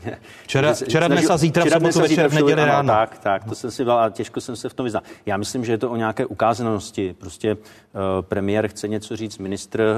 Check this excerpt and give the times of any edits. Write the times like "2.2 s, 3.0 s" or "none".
none